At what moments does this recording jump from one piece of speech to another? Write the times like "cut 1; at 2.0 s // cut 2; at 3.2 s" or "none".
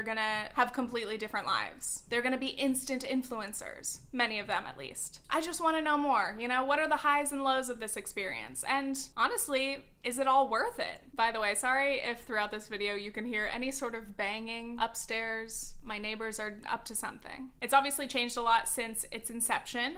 cut 1; at 17.6 s